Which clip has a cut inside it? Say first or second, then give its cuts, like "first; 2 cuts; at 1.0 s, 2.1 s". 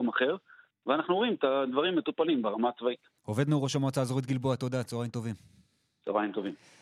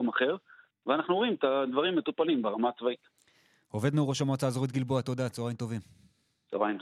first; 1 cut; at 3.2 s